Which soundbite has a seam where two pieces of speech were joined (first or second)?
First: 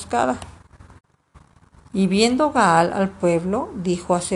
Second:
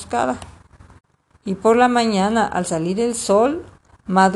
second